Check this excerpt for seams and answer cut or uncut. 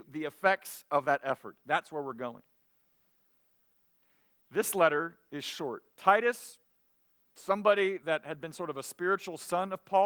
uncut